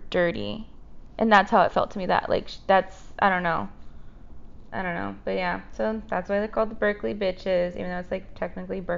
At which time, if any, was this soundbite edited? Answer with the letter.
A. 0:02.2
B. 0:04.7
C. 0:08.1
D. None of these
D